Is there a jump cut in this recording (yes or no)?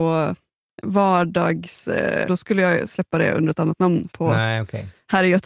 yes